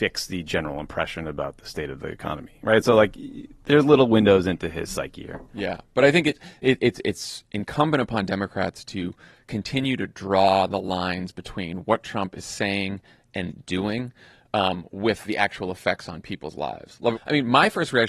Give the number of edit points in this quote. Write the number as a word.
one